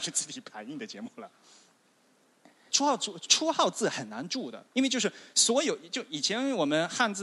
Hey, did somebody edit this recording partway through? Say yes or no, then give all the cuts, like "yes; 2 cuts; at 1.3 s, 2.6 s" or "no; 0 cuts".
yes; 2 cuts; at 2.7 s, 4.7 s